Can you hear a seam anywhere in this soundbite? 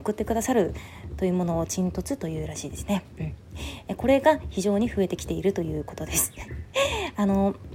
no; 0 cuts

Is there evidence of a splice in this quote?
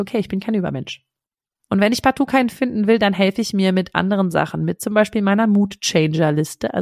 yes; 1 cut; at 1.7 s

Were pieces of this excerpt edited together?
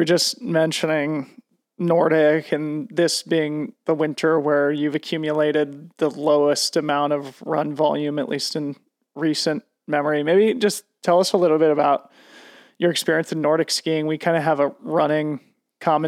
no; 0 cuts

